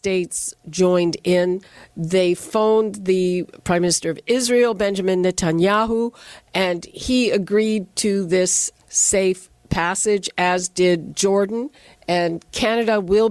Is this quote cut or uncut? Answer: uncut